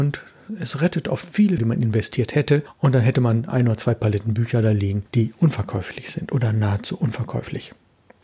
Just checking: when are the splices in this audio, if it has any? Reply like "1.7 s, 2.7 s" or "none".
1.6 s